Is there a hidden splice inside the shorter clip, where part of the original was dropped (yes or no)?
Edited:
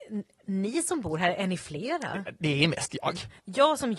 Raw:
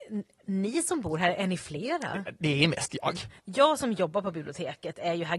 no